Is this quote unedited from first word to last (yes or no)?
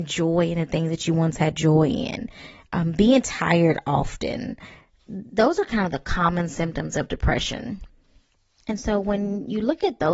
yes